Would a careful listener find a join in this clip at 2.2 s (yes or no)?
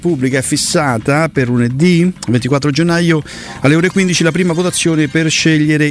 no